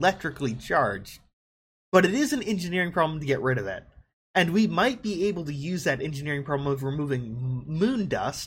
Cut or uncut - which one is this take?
uncut